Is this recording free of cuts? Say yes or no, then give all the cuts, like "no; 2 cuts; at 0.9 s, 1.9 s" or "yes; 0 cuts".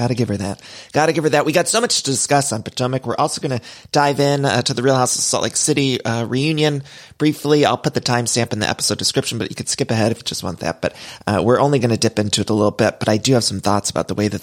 yes; 0 cuts